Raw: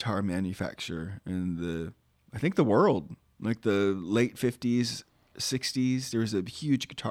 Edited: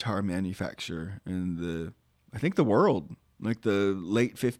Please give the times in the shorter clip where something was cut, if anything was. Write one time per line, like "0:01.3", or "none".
none